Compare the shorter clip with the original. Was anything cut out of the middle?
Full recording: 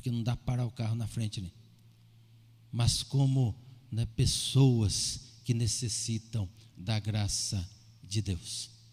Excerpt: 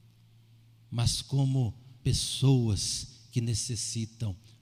yes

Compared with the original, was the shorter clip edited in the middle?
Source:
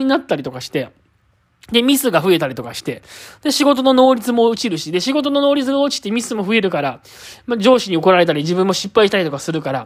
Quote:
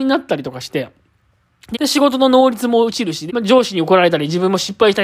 yes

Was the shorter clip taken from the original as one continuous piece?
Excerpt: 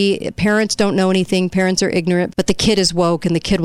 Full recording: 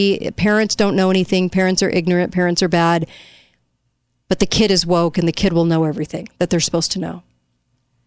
no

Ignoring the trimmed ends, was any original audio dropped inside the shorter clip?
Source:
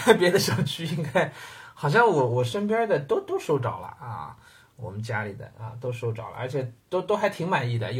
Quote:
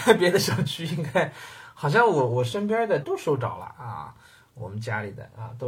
yes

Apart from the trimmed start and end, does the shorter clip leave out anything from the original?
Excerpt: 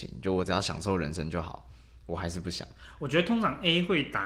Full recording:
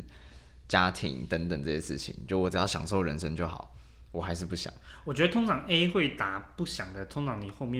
no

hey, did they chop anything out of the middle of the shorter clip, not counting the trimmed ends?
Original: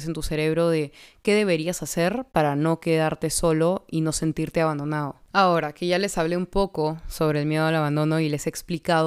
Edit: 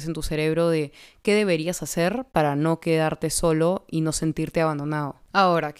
no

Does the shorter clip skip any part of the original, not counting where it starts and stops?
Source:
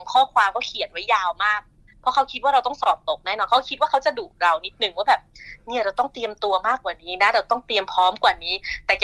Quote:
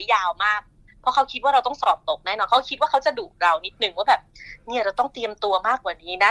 no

